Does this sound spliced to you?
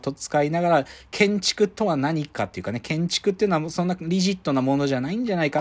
no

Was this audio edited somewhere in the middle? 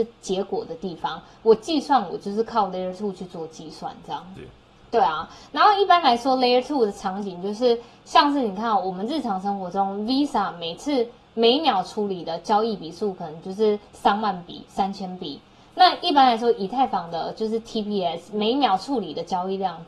yes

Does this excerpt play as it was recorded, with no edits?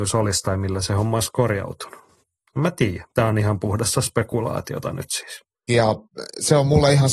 no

